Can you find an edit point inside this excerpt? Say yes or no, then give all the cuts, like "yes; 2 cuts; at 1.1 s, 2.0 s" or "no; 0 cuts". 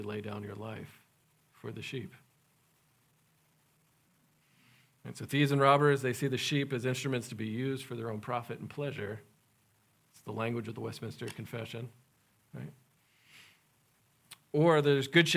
no; 0 cuts